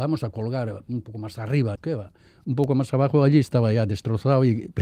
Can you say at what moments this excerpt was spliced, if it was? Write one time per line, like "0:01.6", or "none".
0:01.8